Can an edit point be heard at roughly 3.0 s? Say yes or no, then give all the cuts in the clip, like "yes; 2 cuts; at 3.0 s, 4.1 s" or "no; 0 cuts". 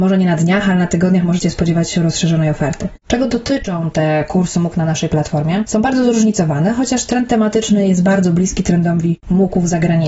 no; 0 cuts